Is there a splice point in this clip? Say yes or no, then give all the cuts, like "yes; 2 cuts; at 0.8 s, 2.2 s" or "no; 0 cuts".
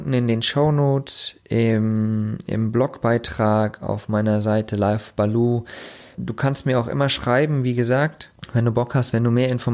no; 0 cuts